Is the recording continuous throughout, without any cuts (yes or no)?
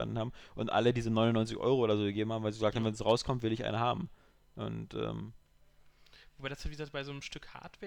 yes